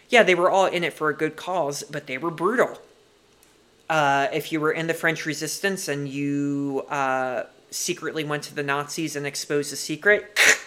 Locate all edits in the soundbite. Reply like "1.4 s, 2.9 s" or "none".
none